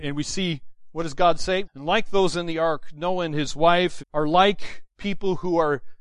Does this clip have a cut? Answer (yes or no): yes